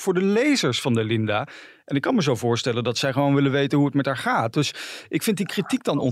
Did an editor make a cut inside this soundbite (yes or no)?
no